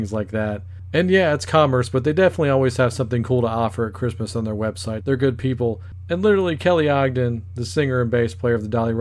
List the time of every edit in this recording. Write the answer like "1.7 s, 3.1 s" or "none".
5.0 s

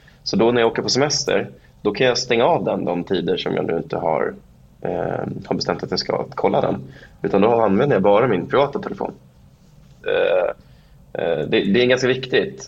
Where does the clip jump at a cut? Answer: 10.0 s

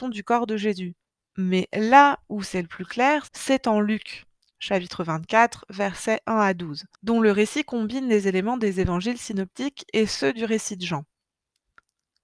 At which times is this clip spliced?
1.2 s, 3.3 s, 6.9 s

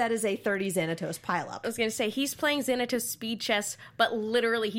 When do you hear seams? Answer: none

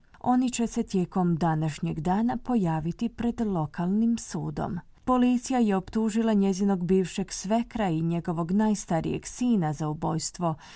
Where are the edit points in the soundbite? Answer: 4.9 s

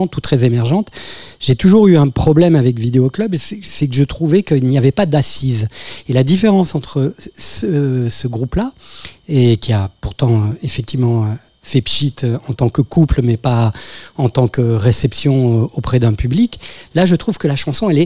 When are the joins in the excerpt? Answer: none

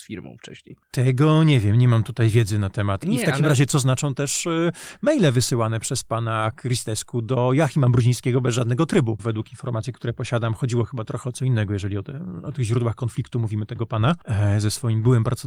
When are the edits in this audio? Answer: 3.0 s, 9.2 s

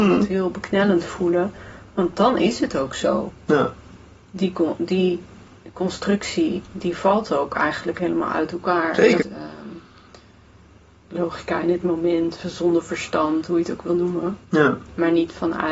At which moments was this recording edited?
9.2 s

